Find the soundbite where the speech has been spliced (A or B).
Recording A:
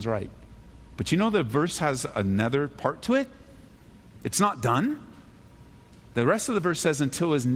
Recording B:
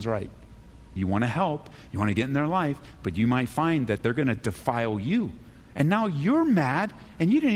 B